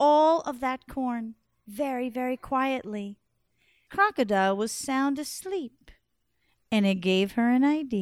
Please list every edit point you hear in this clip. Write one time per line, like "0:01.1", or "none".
0:03.9